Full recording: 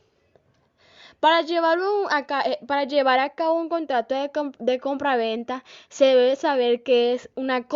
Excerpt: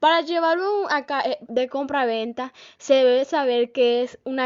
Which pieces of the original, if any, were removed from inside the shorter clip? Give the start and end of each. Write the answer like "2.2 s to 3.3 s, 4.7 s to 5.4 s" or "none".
2.7 s to 4.6 s